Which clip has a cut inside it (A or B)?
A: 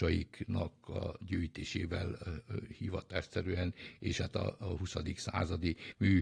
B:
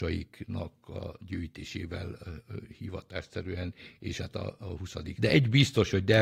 B